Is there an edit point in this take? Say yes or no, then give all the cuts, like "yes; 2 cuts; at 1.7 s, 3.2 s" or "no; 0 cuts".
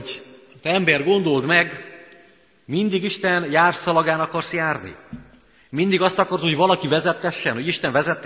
no; 0 cuts